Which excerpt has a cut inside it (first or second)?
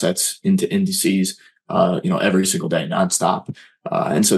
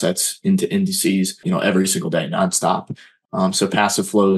second